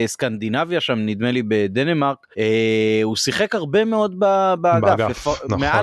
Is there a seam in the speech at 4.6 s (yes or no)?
no